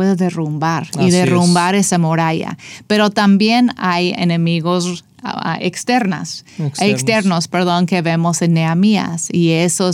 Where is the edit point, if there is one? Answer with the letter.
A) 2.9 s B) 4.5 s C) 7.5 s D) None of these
D